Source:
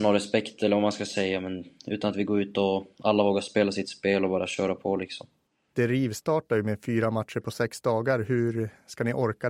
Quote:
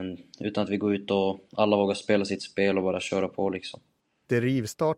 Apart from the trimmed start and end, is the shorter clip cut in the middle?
no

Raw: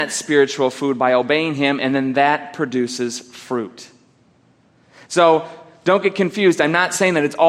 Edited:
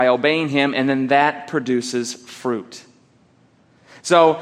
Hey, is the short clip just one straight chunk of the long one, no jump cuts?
yes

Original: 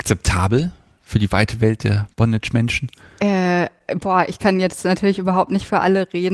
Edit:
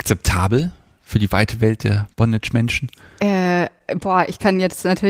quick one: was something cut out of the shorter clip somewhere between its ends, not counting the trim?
no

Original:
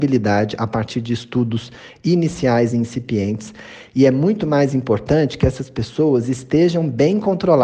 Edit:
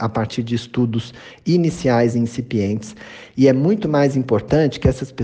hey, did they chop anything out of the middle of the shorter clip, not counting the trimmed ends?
no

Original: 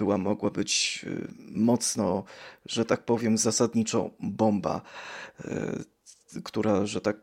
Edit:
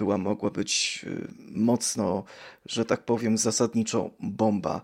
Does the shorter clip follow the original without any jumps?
yes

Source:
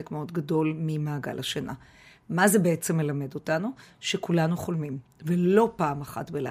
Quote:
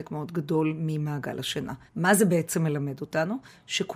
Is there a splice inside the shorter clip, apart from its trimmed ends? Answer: yes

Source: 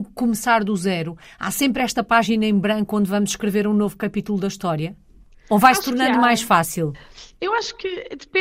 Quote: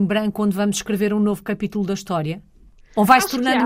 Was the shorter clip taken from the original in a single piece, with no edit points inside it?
yes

